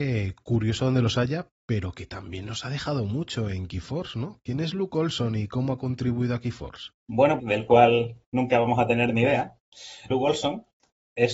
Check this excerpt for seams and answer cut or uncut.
cut